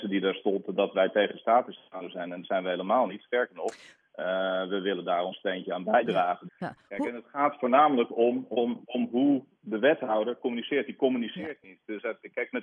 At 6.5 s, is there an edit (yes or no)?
yes